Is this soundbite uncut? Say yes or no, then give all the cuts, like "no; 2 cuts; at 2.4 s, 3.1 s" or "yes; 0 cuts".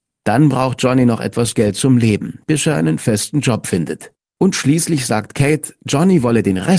no; 1 cut; at 4.2 s